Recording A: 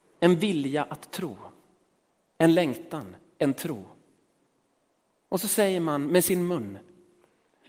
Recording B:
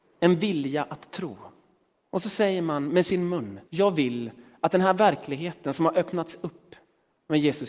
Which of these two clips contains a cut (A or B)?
B